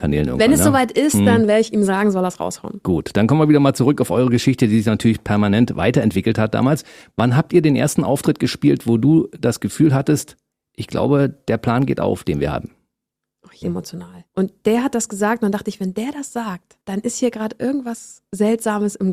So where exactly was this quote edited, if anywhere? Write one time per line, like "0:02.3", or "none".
0:13.6